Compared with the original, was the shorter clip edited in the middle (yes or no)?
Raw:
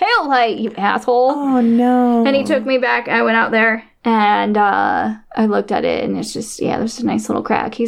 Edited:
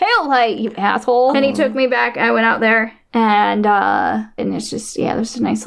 yes